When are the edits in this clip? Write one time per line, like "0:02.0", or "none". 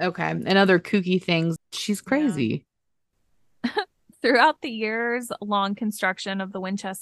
0:01.6